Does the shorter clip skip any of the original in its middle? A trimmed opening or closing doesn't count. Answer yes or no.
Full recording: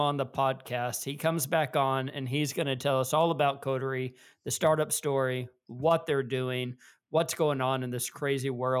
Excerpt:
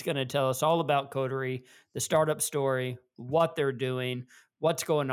no